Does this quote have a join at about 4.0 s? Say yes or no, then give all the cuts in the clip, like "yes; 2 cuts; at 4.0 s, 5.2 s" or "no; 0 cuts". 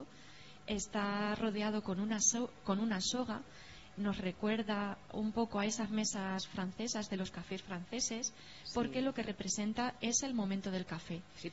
yes; 1 cut; at 4.0 s